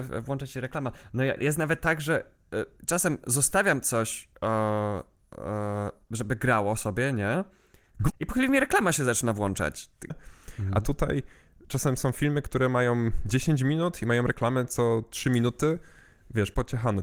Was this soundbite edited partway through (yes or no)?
yes